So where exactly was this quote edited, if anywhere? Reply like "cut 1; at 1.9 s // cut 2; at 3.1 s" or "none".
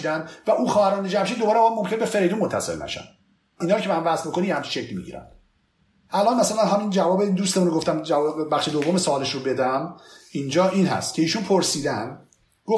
none